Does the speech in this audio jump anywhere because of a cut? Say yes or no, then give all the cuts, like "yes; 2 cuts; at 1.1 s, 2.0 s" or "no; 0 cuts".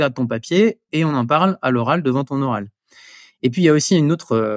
no; 0 cuts